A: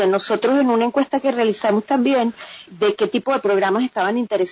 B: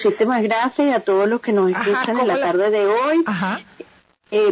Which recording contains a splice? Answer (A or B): A